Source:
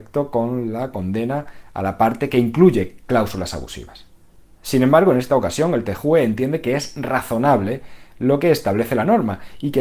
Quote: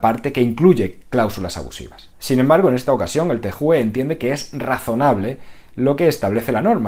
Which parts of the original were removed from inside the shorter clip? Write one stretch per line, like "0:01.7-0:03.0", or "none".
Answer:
0:04.1-0:04.6